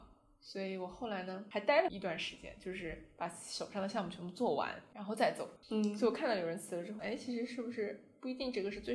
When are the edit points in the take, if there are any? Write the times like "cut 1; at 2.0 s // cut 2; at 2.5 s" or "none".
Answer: cut 1; at 5.6 s // cut 2; at 7.0 s